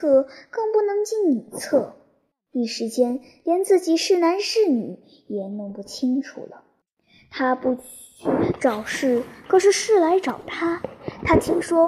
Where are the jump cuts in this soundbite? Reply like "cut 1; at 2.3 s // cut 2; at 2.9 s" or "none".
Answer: none

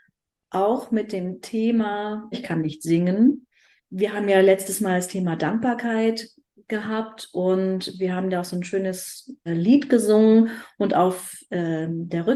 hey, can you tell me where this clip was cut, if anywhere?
cut 1; at 2.3 s // cut 2; at 3.8 s // cut 3; at 9.5 s

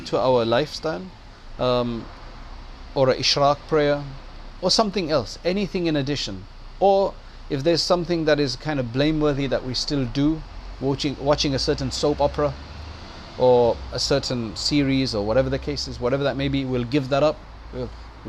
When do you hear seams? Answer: cut 1; at 1.6 s

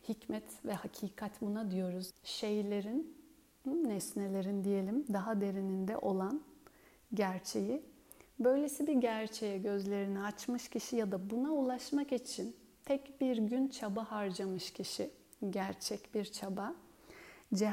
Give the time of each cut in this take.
cut 1; at 2.1 s

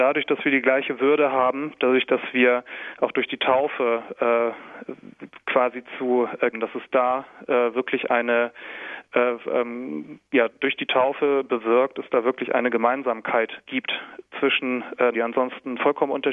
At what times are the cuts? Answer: cut 1; at 6.5 s // cut 2; at 15.1 s

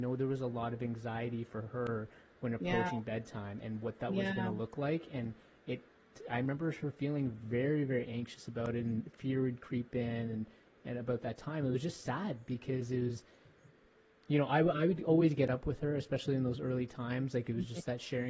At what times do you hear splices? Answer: none

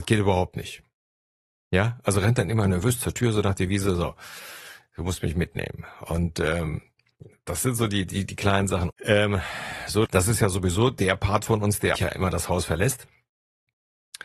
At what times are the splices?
cut 1; at 8.9 s // cut 2; at 10.1 s // cut 3; at 12.0 s

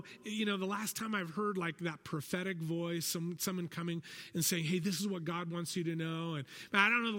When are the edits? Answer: none

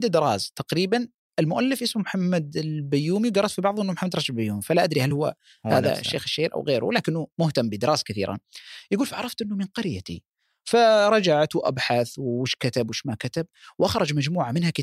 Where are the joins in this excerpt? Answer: none

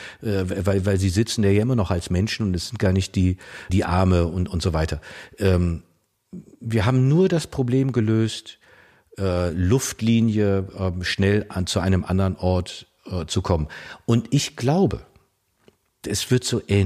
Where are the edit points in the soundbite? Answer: cut 1; at 3.7 s

